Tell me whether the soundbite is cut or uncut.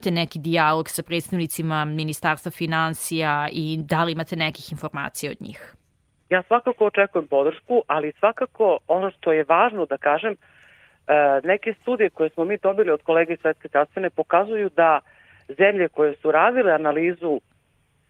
uncut